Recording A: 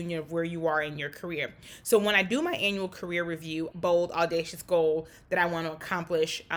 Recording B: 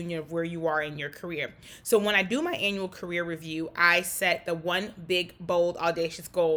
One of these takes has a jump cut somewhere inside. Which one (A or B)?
A